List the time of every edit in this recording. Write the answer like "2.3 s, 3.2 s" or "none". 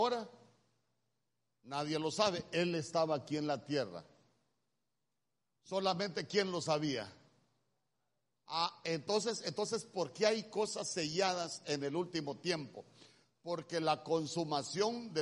none